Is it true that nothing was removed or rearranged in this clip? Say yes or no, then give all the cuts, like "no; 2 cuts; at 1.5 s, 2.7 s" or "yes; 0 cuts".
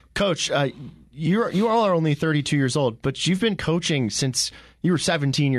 yes; 0 cuts